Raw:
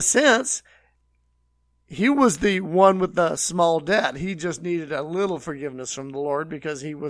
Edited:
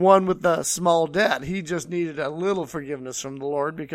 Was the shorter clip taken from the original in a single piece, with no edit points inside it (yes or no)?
yes